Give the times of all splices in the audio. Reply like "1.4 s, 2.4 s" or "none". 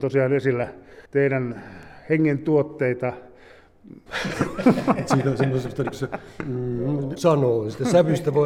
1.1 s, 4.1 s, 7.2 s

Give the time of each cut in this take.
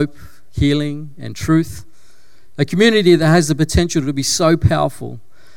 none

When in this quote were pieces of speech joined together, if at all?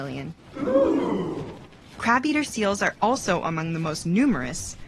none

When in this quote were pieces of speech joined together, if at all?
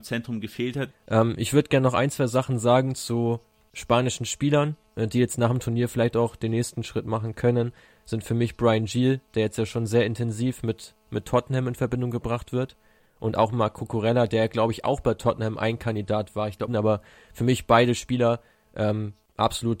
0.9 s, 16.7 s

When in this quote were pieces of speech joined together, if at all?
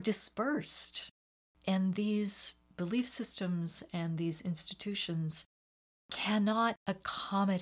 1.6 s

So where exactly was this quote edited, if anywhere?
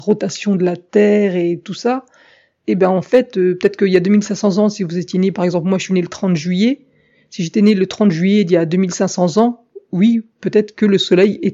none

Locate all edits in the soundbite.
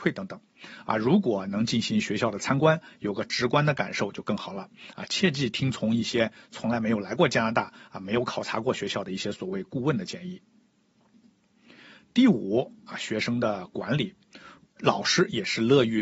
14.6 s

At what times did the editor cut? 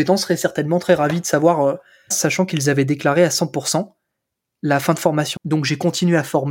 2.1 s, 5.4 s

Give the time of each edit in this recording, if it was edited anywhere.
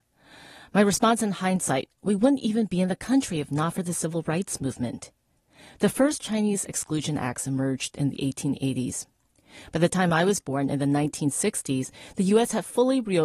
none

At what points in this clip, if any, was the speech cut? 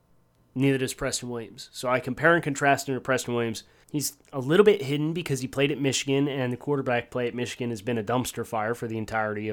3.8 s

